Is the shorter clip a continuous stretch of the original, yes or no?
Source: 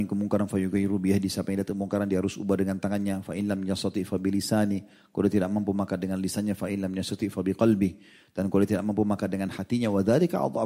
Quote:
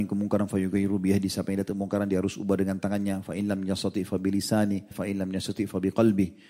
no